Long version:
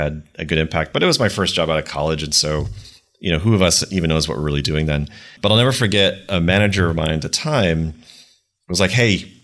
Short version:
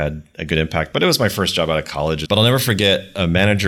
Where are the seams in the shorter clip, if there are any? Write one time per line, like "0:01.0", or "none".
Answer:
0:02.3